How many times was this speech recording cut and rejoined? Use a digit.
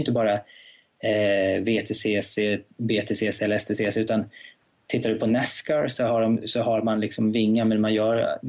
1